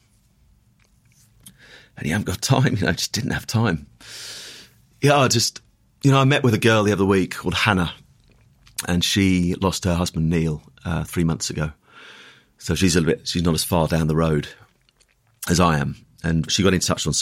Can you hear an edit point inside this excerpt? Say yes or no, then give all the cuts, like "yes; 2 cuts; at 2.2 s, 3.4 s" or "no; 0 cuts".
no; 0 cuts